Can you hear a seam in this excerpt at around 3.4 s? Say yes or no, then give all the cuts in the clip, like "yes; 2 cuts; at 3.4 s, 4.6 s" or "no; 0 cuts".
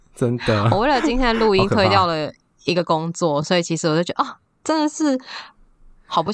no; 0 cuts